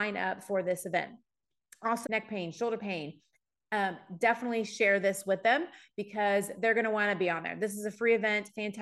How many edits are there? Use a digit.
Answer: 1